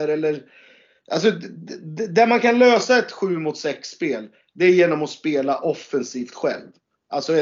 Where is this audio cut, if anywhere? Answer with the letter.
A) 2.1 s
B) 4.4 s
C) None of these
C